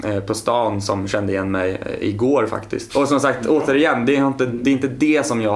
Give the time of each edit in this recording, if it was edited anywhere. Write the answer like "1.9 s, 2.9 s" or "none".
2.9 s